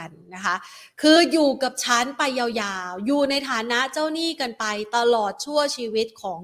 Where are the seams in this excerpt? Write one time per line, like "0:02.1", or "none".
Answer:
none

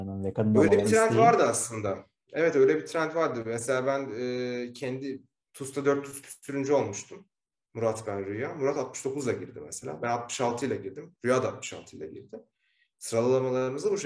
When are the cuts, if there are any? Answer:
0:07.7

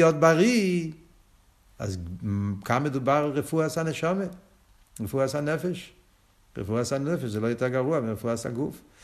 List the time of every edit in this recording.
none

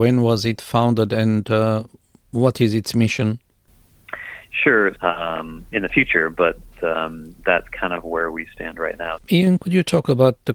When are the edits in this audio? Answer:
0:05.0
0:09.2

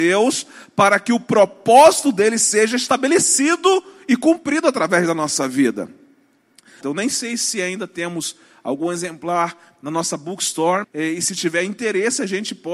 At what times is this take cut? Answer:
0:06.8
0:10.8

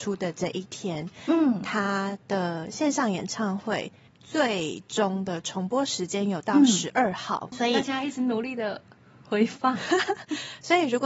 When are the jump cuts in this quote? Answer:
0:07.5

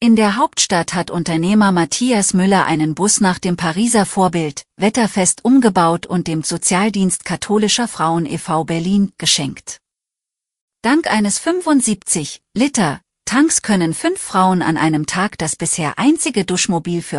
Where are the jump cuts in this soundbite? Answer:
0:04.7

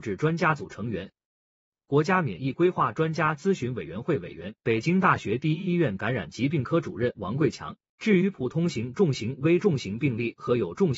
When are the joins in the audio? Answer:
0:08.0

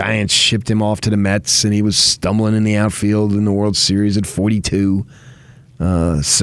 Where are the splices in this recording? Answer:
none

